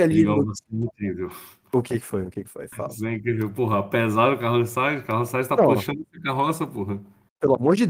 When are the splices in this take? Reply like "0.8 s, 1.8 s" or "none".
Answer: none